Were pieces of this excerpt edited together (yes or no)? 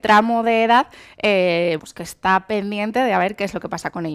yes